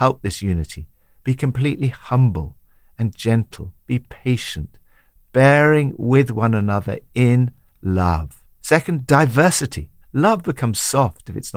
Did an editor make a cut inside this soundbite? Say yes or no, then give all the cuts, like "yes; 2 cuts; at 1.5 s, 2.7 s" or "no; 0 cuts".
yes; 2 cuts; at 8.5 s, 10.0 s